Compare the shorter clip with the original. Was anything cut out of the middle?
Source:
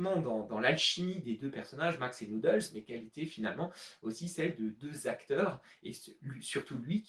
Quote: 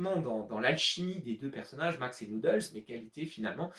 no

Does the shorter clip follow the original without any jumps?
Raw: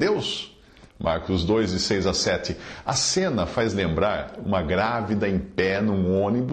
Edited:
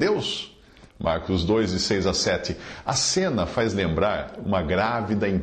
yes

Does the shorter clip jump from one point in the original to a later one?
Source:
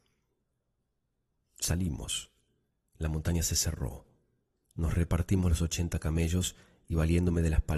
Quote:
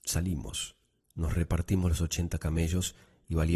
yes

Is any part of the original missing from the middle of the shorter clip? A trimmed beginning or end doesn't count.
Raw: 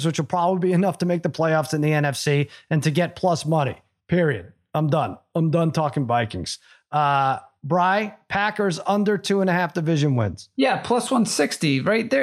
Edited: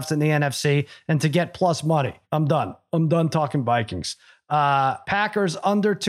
yes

